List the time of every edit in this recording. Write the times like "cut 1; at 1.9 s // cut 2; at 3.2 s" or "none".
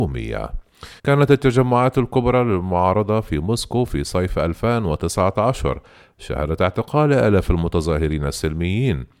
cut 1; at 1.0 s